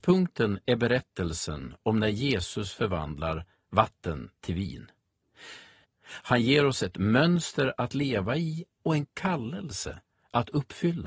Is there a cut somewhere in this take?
yes; 1 cut; at 5.8 s

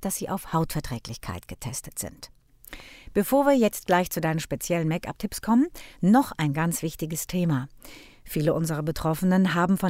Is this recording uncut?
yes; 0 cuts

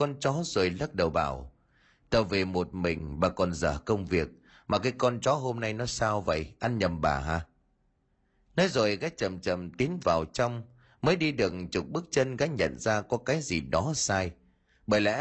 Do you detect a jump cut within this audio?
yes; 1 cut; at 13.9 s

